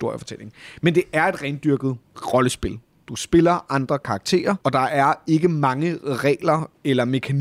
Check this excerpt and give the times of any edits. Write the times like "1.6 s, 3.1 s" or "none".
none